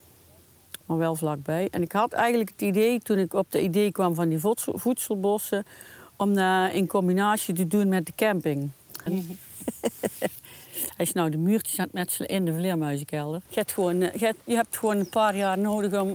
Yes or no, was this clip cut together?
yes